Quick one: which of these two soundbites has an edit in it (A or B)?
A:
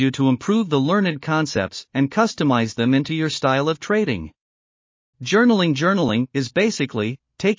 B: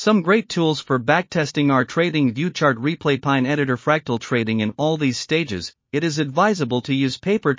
A